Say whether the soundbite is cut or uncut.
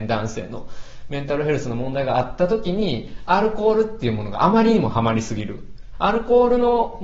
cut